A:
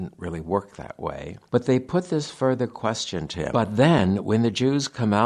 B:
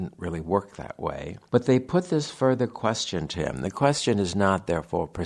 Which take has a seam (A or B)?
A